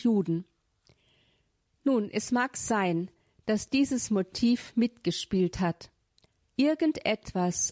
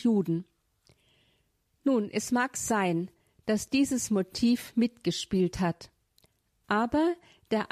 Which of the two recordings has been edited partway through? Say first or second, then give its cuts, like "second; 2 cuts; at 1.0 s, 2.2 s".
first; 1 cut; at 6.4 s